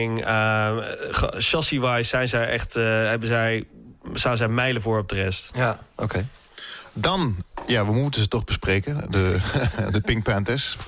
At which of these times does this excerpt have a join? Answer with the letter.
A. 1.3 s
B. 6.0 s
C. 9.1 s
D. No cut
D